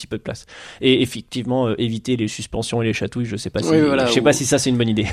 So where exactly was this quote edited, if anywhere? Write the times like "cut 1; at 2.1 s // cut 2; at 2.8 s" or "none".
none